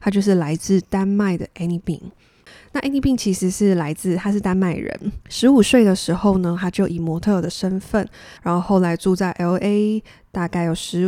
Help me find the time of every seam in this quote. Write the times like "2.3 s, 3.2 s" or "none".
5.2 s, 8.4 s